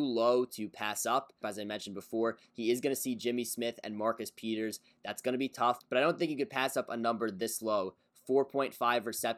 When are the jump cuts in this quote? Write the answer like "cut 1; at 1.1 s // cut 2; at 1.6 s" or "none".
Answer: cut 1; at 1.4 s